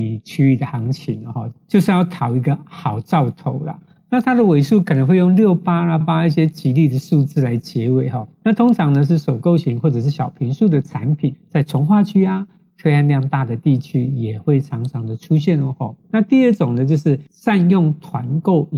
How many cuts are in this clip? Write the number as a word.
three